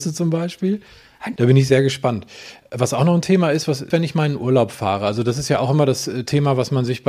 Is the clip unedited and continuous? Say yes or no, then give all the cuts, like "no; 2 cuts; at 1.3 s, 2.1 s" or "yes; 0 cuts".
no; 2 cuts; at 1.4 s, 3.9 s